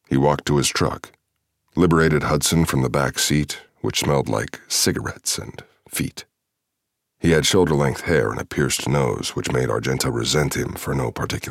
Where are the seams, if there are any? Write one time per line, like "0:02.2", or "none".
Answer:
0:03.7
0:07.0